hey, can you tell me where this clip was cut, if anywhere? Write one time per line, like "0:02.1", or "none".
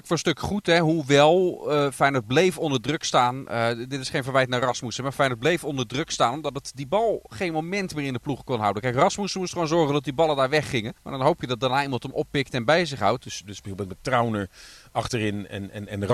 0:11.0
0:13.2